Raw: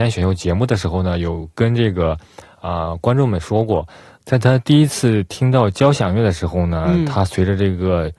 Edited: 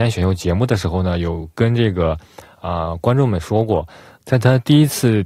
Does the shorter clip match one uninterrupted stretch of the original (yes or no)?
yes